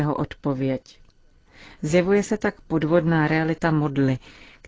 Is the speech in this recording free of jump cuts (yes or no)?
yes